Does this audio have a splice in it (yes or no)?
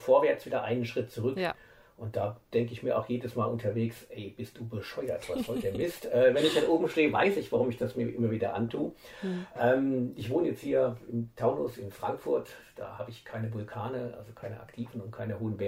no